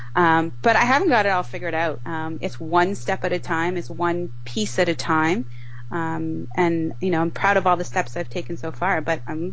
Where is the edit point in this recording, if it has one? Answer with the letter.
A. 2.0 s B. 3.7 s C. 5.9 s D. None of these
A